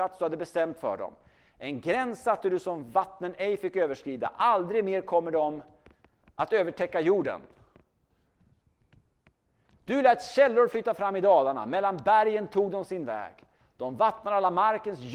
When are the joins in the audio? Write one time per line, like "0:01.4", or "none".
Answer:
none